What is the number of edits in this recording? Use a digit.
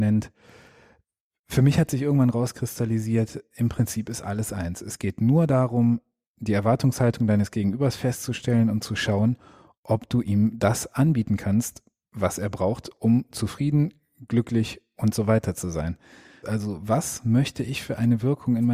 1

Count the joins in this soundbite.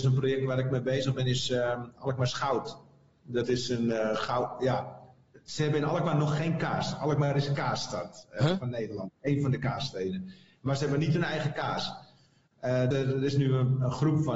1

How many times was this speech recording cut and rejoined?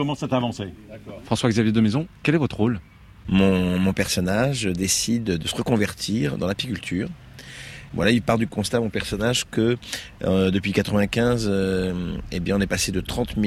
0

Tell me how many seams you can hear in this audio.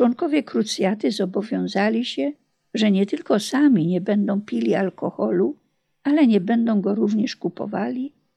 0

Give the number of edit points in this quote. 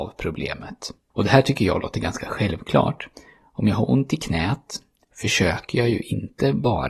1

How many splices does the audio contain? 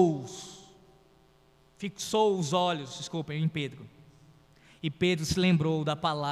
0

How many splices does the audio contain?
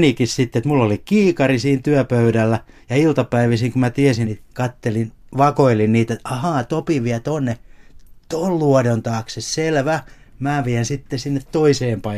1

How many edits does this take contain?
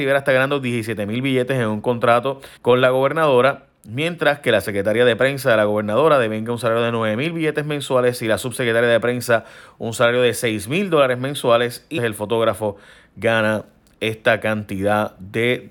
2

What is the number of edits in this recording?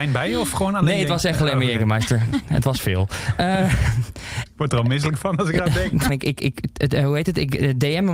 2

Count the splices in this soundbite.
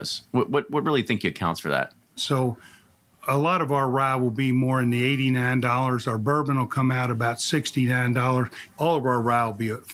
2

